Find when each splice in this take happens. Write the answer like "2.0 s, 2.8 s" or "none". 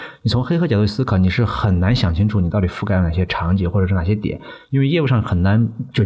none